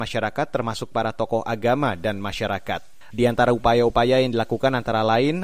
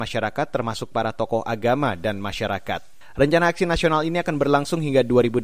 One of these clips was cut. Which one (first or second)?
first